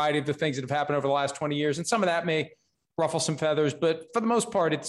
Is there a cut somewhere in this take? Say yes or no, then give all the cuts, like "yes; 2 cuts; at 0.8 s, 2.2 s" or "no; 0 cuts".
no; 0 cuts